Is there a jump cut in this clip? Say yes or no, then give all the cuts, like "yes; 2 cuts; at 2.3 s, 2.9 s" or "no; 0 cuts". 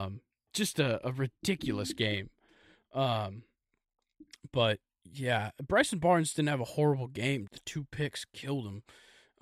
yes; 1 cut; at 7.5 s